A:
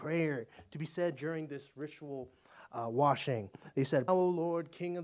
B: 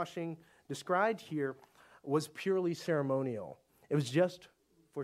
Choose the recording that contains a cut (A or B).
A